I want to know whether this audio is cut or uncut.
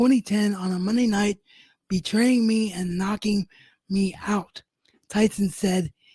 uncut